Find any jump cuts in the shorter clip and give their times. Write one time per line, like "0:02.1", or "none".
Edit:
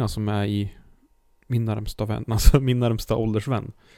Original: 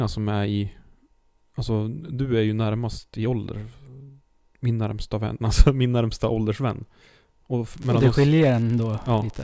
0:01.3